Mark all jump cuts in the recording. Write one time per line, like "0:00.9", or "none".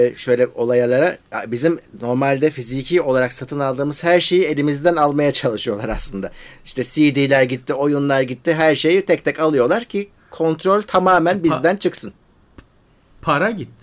none